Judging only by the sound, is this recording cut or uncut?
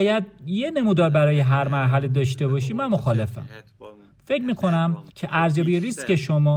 cut